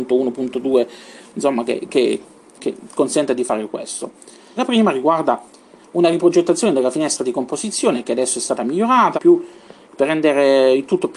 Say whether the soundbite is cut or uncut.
cut